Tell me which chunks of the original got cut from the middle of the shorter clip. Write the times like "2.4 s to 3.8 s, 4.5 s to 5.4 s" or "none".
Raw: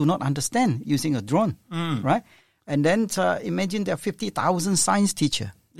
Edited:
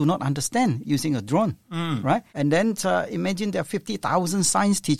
2.3 s to 2.6 s